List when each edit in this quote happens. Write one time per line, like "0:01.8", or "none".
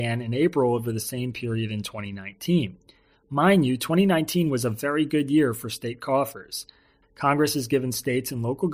0:07.0